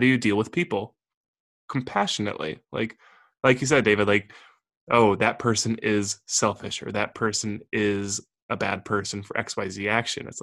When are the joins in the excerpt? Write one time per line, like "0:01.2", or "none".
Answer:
none